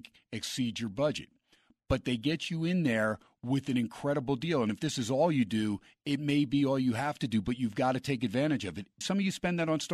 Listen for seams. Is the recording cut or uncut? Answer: cut